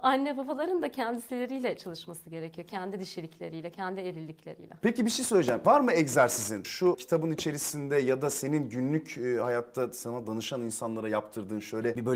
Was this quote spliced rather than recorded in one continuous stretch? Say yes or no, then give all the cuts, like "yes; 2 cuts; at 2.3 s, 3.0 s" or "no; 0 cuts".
no; 0 cuts